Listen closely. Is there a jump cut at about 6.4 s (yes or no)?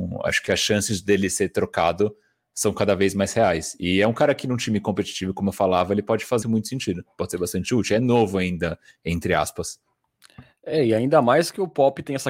yes